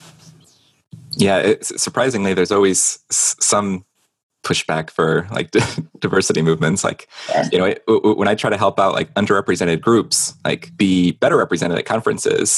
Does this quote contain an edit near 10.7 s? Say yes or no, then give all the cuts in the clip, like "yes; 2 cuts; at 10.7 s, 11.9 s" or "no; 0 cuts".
yes; 1 cut; at 10.7 s